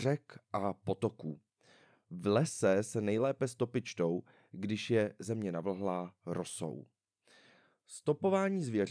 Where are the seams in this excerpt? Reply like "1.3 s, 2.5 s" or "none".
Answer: none